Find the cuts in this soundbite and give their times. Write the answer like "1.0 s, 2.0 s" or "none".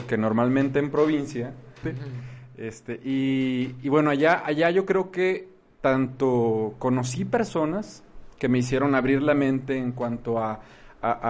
1.8 s